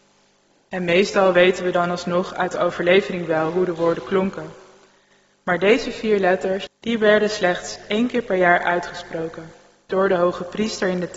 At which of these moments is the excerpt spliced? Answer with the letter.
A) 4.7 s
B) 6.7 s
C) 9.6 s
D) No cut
B